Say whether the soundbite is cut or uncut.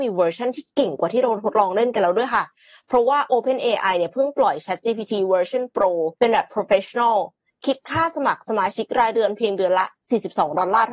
cut